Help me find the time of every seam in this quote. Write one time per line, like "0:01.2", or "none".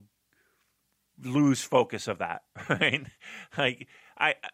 none